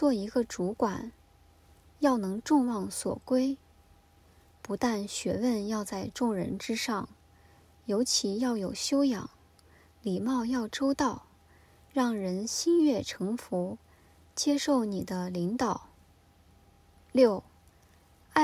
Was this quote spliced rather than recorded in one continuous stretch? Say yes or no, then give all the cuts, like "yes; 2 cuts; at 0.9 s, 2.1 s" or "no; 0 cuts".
no; 0 cuts